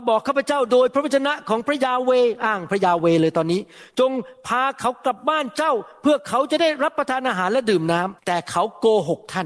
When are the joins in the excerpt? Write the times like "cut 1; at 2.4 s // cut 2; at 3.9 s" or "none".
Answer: cut 1; at 5.2 s // cut 2; at 8.2 s